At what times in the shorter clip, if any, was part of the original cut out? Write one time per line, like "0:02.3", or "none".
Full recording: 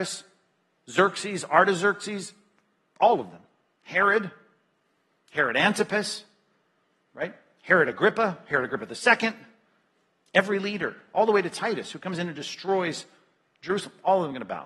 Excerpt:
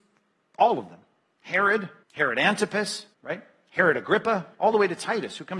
0:02.0
0:03.1
0:04.5